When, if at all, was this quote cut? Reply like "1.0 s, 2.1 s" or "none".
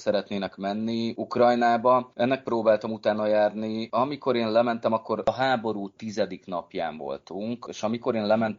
none